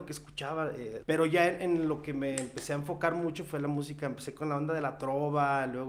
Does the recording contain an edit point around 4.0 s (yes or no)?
no